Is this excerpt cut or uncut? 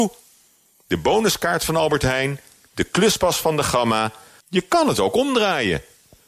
cut